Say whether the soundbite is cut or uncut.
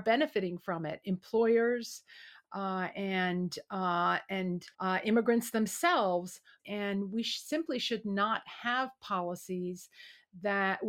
cut